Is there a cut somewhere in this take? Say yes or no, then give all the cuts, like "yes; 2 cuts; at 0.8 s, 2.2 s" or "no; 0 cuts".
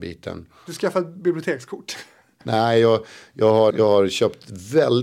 yes; 2 cuts; at 2.4 s, 3.7 s